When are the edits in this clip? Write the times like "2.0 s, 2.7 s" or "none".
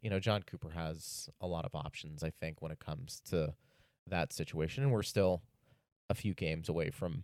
none